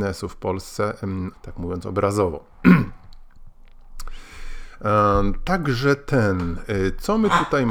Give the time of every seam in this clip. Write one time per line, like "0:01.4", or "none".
0:01.3